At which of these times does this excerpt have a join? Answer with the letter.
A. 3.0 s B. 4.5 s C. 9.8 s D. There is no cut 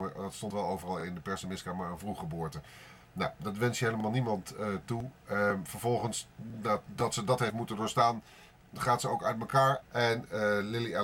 C